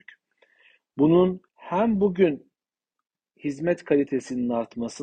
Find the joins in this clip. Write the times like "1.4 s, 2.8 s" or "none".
1.5 s